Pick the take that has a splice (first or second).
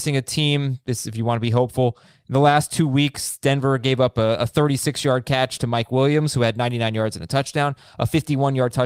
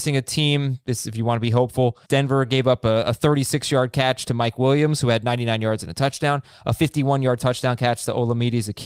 second